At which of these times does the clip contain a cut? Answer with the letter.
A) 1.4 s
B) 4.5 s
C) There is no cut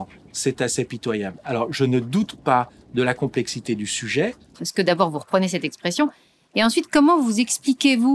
B